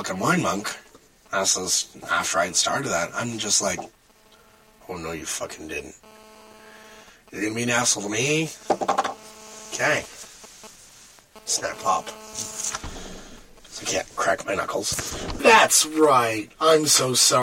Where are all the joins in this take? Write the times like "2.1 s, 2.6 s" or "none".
11.8 s, 15.4 s